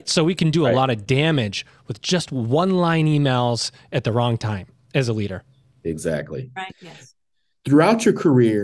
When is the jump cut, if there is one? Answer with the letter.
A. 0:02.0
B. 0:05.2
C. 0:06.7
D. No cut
C